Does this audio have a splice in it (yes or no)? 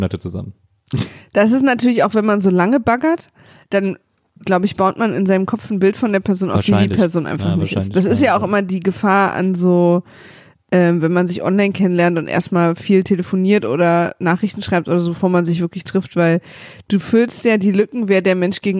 no